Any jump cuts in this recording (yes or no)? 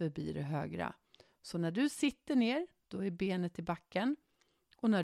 no